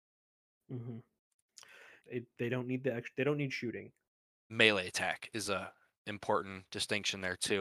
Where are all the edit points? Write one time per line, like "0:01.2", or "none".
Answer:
0:02.0
0:04.5